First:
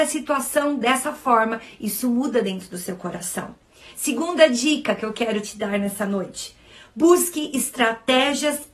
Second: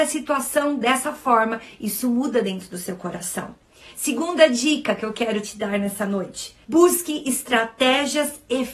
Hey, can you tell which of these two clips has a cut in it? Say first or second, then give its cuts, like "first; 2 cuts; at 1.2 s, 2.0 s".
second; 1 cut; at 6.6 s